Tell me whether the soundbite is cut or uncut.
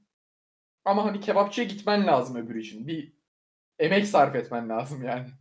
uncut